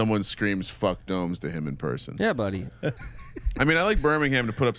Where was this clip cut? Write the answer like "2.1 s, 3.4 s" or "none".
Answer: 3.0 s

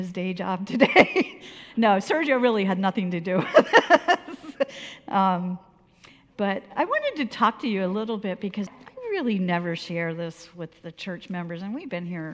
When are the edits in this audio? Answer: 8.7 s

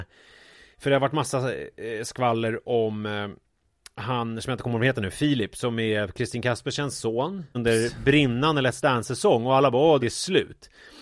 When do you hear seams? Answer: 7.5 s, 10.0 s

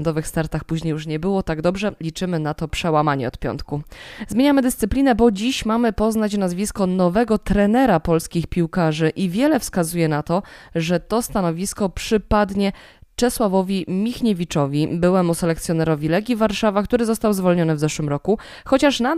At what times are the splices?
2.0 s

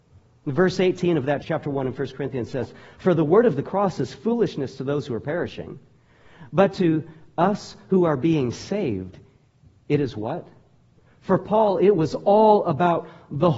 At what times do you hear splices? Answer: 1.4 s, 11.0 s

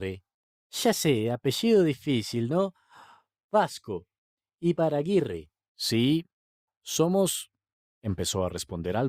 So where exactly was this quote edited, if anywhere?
5.6 s

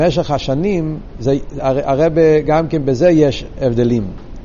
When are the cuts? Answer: 1.6 s

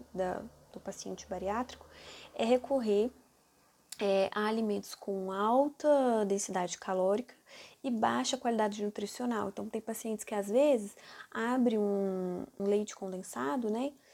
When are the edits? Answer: 12.6 s

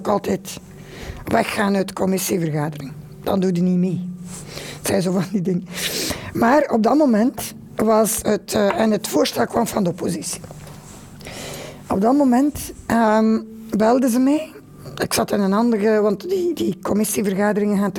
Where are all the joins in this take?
none

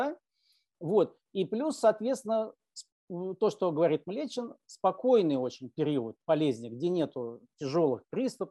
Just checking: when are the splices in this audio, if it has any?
none

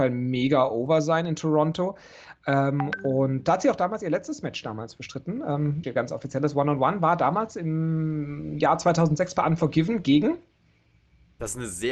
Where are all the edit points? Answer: 5.8 s

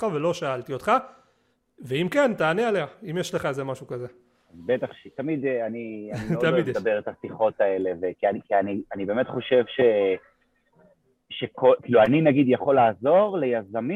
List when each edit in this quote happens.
none

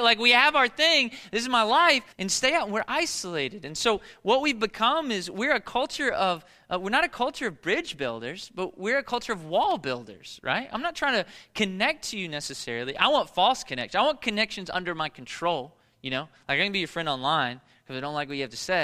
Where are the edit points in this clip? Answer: 2.1 s

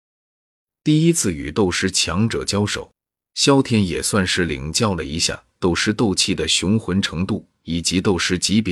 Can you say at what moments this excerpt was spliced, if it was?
none

